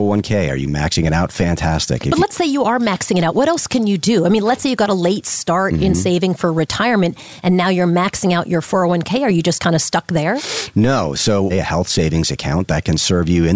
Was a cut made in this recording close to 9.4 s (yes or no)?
no